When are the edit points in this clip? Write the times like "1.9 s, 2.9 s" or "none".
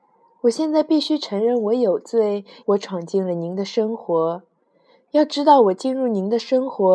2.6 s